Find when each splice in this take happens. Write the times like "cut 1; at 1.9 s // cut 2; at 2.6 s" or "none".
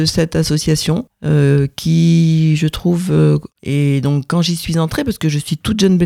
cut 1; at 3.6 s